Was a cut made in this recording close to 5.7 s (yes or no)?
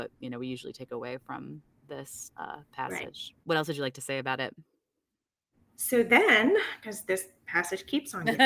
no